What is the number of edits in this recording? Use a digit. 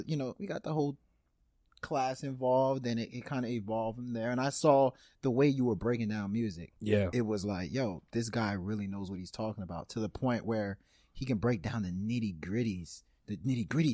0